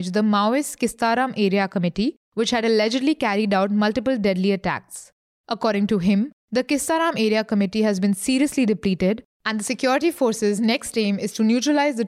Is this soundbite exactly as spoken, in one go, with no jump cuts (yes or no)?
yes